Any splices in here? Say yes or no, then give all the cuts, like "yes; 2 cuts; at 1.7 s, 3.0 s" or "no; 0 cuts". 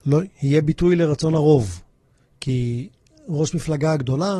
no; 0 cuts